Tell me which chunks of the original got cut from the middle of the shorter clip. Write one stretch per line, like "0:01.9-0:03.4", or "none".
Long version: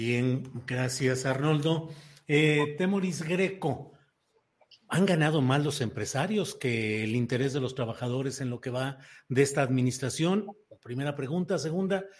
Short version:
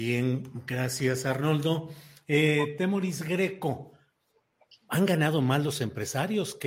none